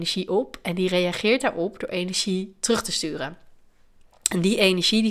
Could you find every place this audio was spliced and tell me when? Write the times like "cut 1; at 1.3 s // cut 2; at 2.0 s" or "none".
none